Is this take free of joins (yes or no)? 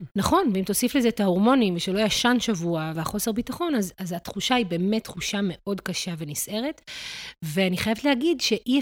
no